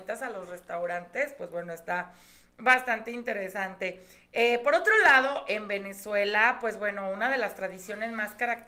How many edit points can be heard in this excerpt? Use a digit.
0